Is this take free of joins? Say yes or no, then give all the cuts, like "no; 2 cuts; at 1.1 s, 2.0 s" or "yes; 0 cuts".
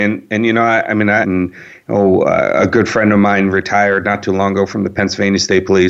no; 1 cut; at 1.2 s